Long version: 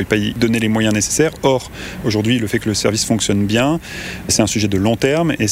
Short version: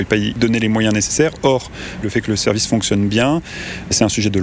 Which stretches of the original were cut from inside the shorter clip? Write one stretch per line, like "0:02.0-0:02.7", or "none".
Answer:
0:02.0-0:02.4